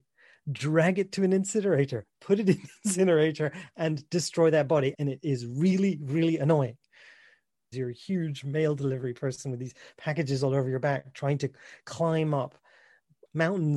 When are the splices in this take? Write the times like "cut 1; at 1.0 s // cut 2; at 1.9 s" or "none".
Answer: cut 1; at 4.9 s // cut 2; at 7.7 s